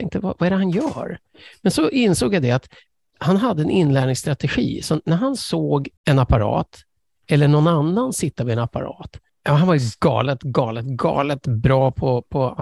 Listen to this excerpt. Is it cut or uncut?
cut